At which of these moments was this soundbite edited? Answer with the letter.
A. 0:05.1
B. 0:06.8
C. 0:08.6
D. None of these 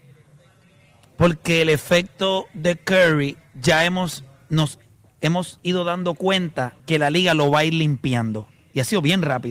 B